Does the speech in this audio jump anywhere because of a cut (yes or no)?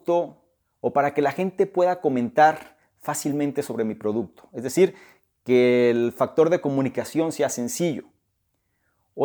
no